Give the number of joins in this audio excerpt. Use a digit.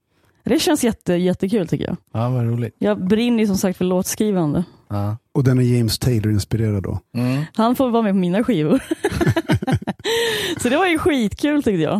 1